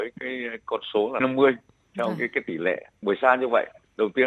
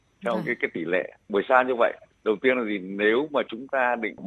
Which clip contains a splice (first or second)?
first